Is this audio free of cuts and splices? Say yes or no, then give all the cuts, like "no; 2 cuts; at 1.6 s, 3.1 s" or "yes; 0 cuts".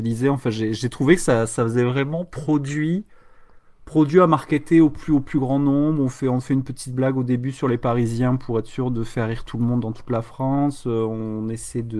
yes; 0 cuts